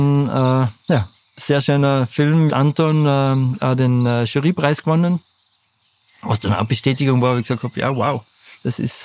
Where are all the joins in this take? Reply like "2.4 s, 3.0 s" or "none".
2.5 s